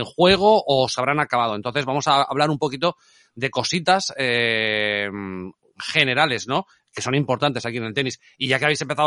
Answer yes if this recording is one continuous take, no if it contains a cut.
yes